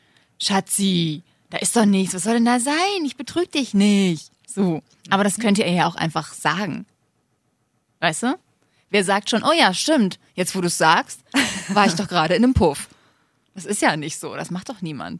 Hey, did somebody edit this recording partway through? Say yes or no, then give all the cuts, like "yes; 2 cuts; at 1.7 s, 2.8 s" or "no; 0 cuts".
no; 0 cuts